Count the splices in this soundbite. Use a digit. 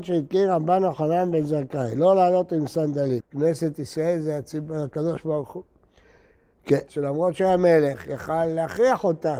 2